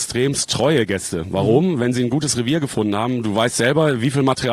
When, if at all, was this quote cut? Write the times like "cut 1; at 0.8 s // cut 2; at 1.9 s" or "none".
none